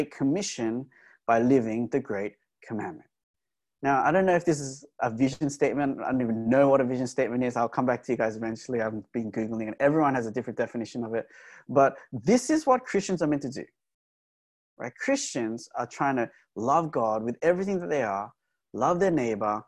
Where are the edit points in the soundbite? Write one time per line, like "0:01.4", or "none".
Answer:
none